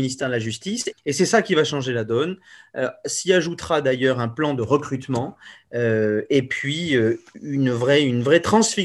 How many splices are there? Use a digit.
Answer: 1